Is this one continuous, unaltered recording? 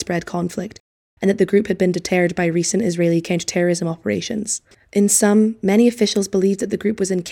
yes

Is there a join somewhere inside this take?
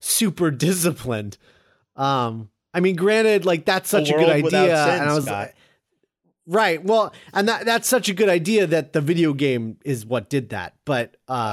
no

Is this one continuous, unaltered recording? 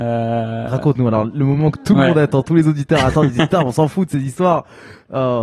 yes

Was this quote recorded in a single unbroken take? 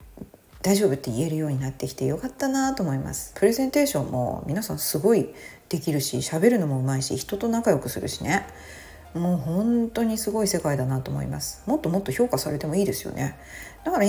no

